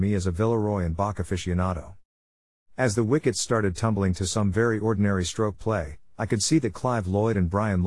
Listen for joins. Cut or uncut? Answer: uncut